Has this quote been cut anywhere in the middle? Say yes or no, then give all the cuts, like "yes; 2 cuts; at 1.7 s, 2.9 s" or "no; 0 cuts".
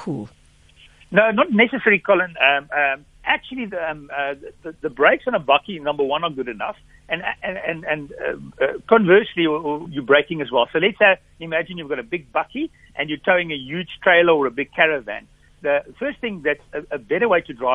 yes; 2 cuts; at 3.1 s, 9.9 s